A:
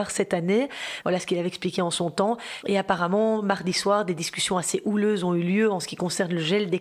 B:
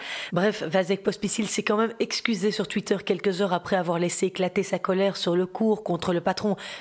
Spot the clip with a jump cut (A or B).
A